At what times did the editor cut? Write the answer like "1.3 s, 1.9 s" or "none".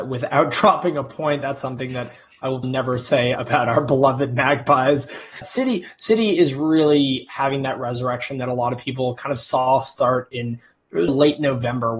2.6 s, 5.4 s, 11.1 s